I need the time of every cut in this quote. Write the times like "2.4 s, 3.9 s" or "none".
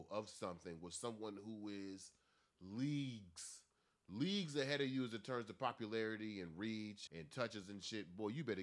7.1 s